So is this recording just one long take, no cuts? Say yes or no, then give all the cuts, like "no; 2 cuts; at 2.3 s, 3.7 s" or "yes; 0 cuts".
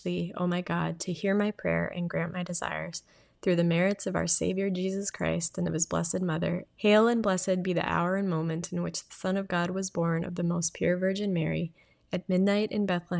no; 1 cut; at 6.7 s